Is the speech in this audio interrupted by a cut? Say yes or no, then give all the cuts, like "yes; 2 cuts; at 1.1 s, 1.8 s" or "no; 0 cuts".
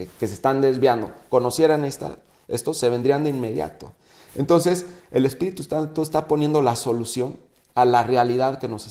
no; 0 cuts